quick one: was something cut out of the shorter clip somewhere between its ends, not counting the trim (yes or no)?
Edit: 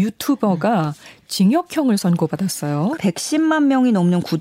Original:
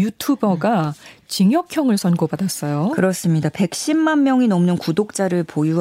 yes